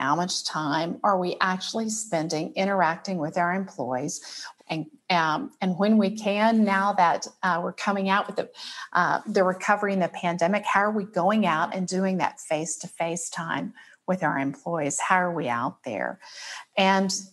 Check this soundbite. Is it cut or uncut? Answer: cut